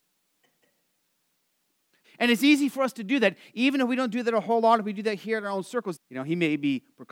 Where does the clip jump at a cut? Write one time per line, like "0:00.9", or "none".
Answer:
0:02.0
0:06.0